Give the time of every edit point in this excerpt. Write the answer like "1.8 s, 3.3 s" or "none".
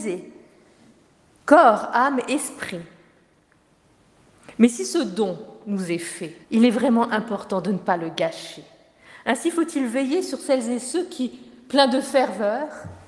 6.4 s